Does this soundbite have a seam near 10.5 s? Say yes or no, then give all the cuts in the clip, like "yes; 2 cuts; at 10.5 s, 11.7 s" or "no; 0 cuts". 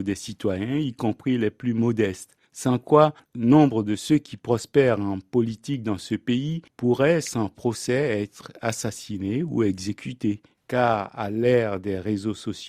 yes; 1 cut; at 10.5 s